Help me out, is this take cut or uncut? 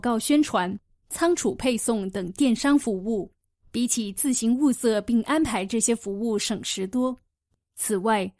uncut